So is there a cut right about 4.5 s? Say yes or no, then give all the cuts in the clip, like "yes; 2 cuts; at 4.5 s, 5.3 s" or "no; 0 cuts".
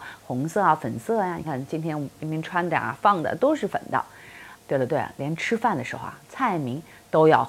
yes; 2 cuts; at 1.4 s, 4.5 s